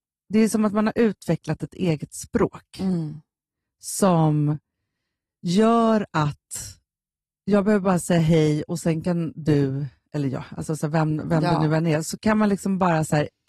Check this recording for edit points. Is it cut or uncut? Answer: uncut